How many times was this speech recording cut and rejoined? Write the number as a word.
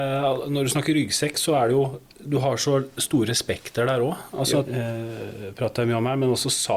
one